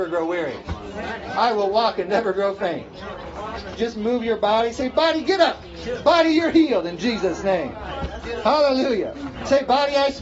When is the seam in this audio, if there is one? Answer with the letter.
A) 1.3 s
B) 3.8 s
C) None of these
B